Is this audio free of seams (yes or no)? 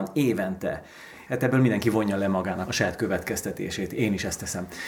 no